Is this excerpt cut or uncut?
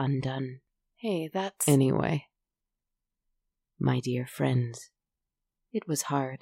uncut